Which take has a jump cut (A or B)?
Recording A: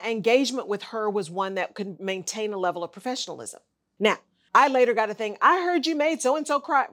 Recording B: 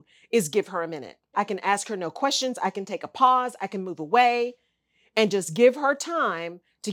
B